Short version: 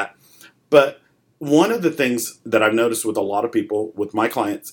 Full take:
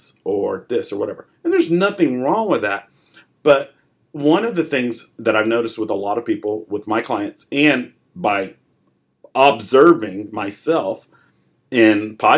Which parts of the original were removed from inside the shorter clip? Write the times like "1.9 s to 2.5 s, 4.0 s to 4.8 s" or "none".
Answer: none